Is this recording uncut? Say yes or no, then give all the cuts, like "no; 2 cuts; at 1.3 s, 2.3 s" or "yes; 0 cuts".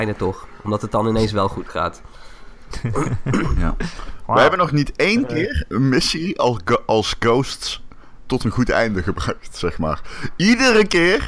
no; 1 cut; at 8.2 s